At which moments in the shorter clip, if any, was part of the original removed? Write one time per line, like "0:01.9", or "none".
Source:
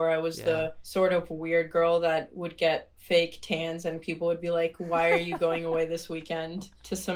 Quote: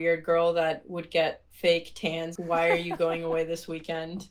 0:02.4